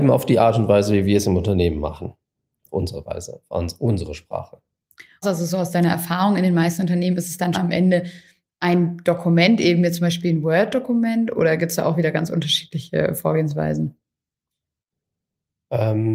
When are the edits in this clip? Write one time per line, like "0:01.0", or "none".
0:05.2
0:07.5